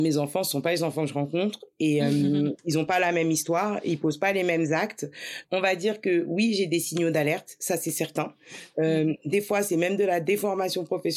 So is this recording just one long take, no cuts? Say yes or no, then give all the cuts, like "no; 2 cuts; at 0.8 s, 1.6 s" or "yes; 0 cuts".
no; 1 cut; at 5.4 s